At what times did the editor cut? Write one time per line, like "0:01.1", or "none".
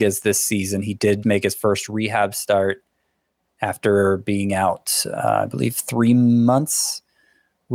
0:01.2